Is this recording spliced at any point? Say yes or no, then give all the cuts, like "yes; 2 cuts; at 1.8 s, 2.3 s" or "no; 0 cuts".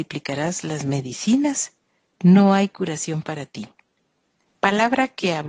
yes; 1 cut; at 4.4 s